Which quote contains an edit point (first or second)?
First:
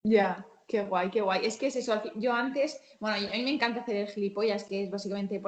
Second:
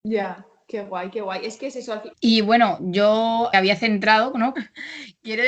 second